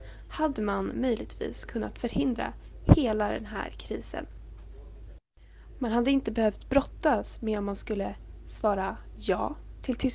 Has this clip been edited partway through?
no; 0 cuts

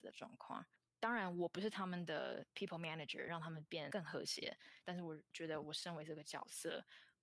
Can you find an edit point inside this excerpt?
yes; 2 cuts; at 3.3 s, 4.8 s

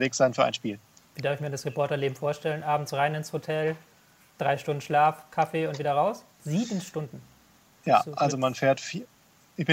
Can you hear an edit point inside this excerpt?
yes; 1 cut; at 6.4 s

